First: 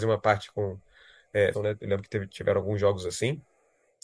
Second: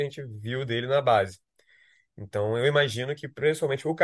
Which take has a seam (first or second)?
first